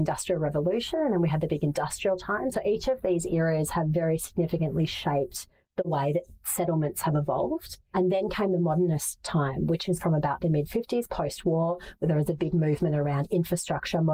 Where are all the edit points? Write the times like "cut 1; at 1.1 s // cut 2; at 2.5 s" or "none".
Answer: cut 1; at 7.9 s